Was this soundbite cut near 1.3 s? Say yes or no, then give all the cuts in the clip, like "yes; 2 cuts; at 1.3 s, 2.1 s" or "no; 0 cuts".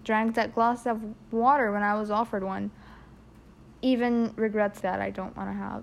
no; 1 cut; at 4.8 s